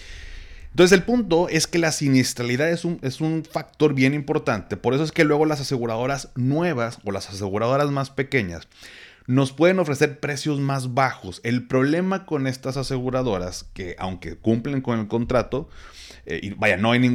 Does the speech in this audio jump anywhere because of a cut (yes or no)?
no